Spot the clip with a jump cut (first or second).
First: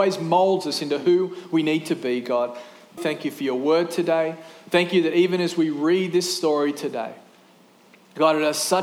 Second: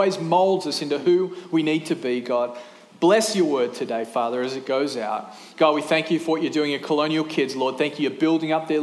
first